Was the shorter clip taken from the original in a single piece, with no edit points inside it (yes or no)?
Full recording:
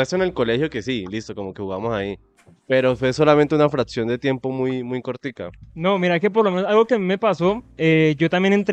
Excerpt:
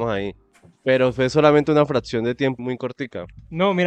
no